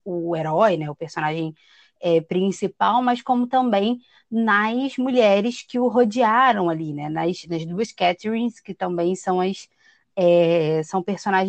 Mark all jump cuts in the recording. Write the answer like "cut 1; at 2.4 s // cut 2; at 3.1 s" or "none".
none